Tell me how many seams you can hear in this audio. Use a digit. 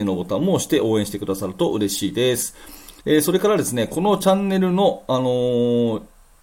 1